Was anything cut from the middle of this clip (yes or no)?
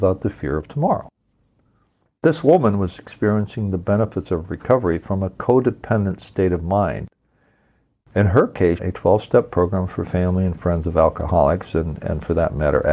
yes